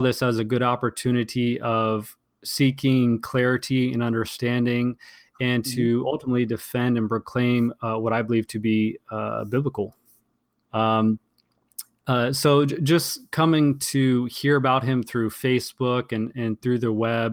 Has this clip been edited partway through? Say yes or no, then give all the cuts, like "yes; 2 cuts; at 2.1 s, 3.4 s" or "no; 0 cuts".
yes; 1 cut; at 10.6 s